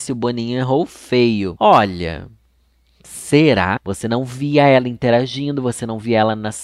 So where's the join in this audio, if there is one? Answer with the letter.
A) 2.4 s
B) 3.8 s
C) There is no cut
B